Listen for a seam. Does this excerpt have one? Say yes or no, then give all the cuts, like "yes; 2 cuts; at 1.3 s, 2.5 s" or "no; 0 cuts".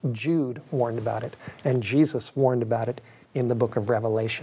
no; 0 cuts